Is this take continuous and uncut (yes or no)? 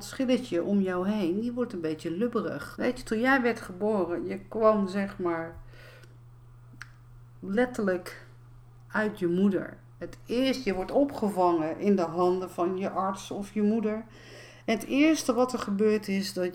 no